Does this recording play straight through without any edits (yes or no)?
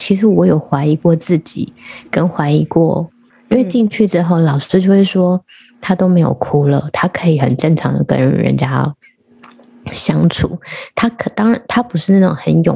no